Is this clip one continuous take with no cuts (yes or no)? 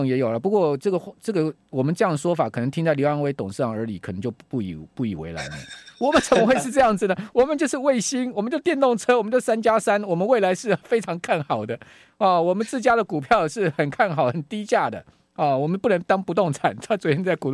yes